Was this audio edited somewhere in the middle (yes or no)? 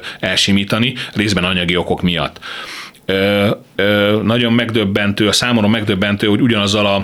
yes